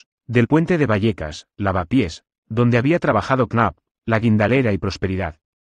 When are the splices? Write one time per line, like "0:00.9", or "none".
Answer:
0:04.0